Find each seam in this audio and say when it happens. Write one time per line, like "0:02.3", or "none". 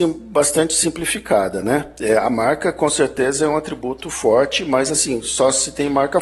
none